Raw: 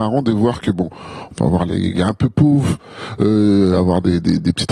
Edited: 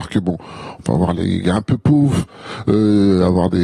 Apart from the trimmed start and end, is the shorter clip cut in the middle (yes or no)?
no